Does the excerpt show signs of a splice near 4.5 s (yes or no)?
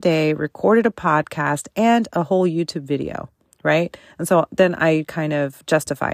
no